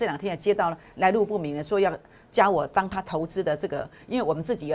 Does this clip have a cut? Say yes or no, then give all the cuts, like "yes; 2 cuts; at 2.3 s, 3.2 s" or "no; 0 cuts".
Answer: no; 0 cuts